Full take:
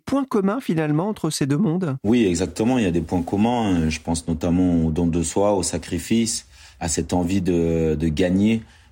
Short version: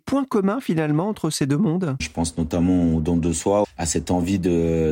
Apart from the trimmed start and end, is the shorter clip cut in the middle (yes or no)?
yes